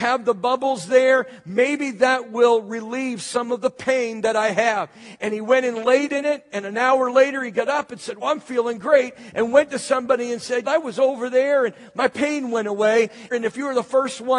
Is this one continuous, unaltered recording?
no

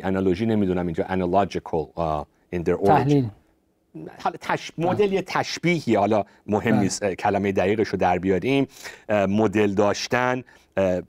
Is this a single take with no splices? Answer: yes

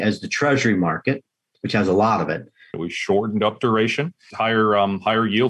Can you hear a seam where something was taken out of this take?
yes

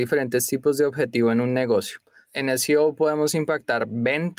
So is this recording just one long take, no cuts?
yes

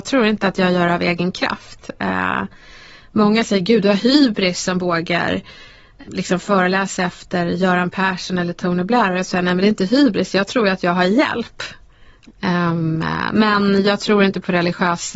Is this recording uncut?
no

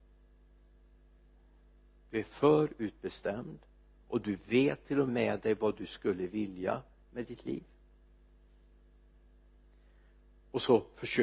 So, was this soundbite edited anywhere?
yes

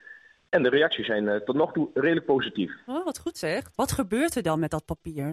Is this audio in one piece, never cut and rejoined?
no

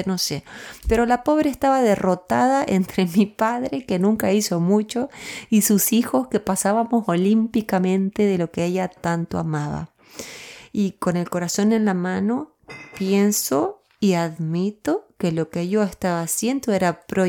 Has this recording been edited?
yes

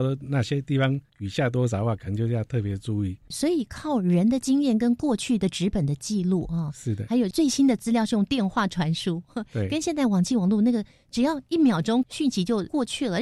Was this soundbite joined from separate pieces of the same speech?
no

